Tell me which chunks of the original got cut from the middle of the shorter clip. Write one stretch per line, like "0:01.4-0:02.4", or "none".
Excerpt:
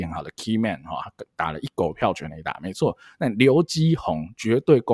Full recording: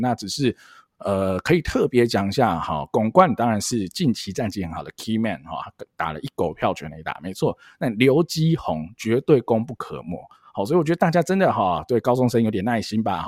none